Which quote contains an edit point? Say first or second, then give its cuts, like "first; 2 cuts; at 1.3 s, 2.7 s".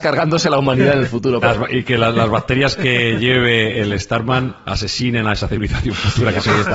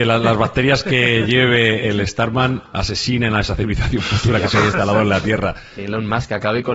first; 1 cut; at 1.4 s